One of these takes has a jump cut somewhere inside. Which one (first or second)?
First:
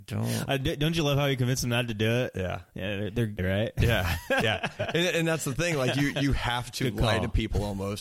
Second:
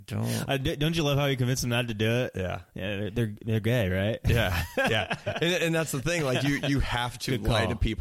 first